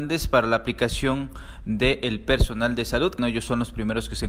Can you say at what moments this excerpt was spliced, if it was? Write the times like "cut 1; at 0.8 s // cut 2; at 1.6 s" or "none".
cut 1; at 3.2 s